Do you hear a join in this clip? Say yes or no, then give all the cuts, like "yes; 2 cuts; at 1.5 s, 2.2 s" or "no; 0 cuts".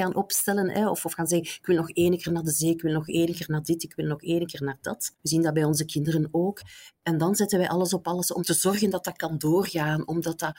yes; 1 cut; at 5.2 s